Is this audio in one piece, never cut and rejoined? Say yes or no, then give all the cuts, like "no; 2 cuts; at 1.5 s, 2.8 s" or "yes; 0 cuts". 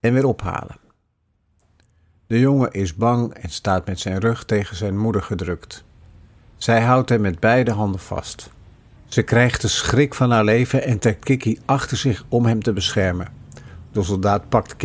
no; 1 cut; at 9.0 s